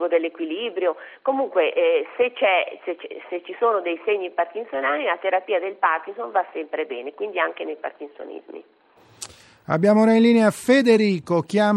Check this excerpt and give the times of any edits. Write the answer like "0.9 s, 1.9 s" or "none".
none